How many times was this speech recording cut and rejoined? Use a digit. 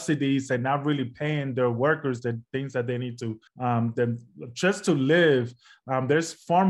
1